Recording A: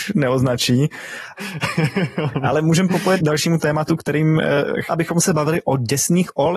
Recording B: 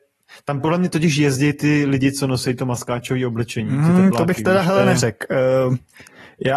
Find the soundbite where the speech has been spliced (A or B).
A